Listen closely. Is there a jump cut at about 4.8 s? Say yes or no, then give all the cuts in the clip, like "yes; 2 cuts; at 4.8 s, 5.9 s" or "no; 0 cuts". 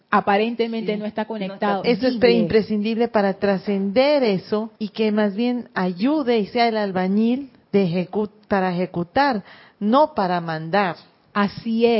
yes; 2 cuts; at 1.8 s, 4.8 s